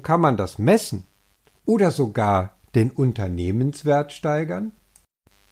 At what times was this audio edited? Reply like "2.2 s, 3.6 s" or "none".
none